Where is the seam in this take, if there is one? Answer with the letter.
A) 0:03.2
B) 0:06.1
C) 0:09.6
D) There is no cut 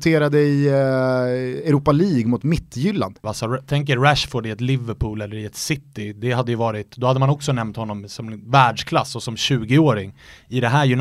A